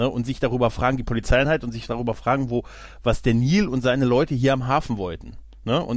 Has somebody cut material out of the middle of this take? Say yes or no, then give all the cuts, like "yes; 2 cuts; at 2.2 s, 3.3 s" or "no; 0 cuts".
no; 0 cuts